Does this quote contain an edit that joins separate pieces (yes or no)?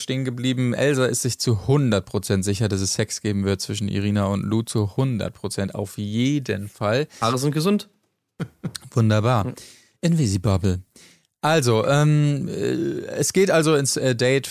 yes